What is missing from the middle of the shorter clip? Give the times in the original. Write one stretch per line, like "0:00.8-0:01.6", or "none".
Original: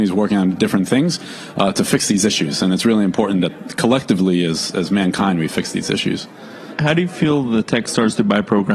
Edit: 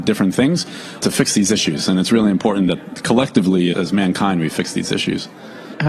0:01.5-0:01.7
0:04.5-0:04.7